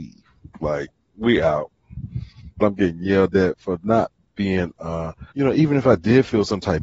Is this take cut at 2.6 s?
yes; 2 cuts; at 2.6 s, 5.3 s

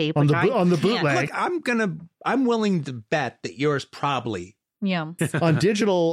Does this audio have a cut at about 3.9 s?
no; 2 cuts; at 1.3 s, 5.2 s

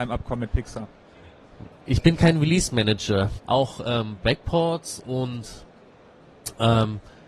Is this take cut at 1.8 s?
no; 1 cut; at 3.4 s

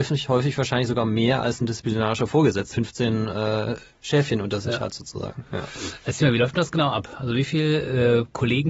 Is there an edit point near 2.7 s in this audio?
yes; 1 cut; at 2.7 s

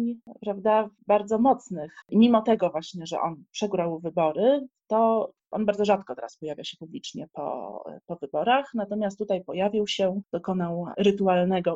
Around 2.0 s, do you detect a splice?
yes; 1 cut; at 2.0 s

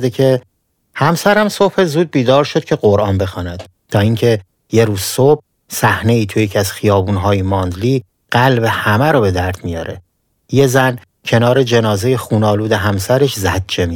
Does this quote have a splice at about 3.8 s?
yes; 1 cut; at 3.8 s

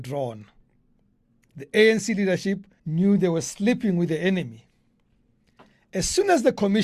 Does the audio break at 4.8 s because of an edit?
no; 1 cut; at 2.8 s

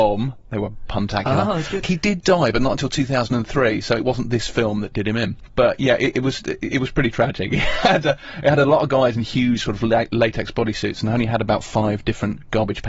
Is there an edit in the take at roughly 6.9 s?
no; 1 cut; at 1.8 s

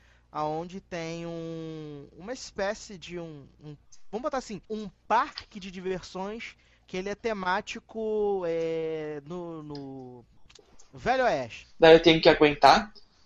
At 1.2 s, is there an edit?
no; 2 cuts; at 4.6 s, 11.6 s

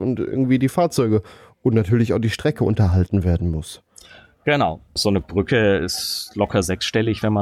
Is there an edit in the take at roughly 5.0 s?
yes; 1 cut; at 5.0 s

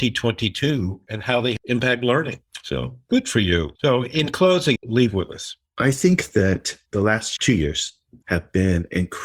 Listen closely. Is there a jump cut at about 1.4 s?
no; 2 cuts; at 3.7 s, 4.8 s

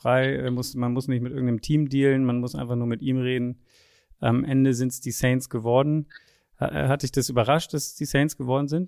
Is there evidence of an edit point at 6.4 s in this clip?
no; 0 cuts

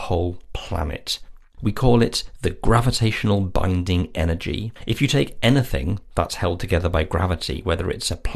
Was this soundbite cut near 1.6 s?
yes; 2 cuts; at 1.6 s, 4.8 s

